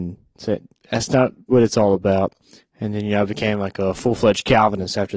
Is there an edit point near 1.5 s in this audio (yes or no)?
yes